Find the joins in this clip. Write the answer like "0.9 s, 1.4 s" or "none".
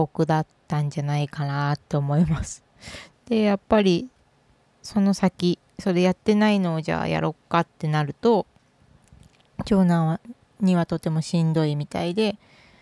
3.1 s